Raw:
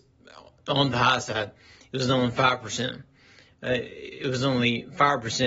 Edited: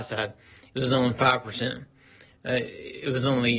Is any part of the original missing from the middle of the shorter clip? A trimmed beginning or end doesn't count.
no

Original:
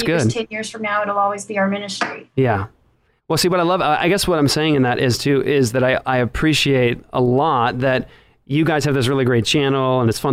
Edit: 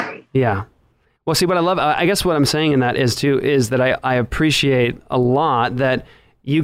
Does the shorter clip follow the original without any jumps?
yes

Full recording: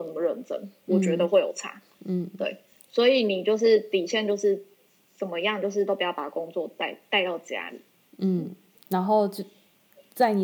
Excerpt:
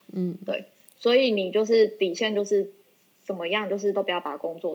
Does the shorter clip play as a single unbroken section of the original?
yes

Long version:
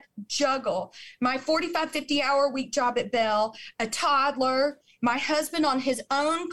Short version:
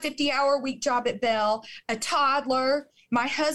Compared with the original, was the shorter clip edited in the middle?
no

